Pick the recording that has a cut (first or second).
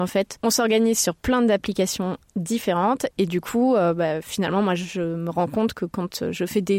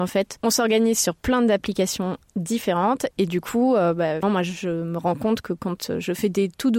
second